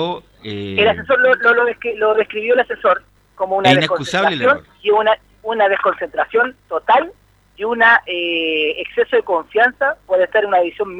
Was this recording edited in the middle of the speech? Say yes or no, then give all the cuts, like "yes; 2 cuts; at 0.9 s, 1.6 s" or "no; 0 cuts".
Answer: no; 0 cuts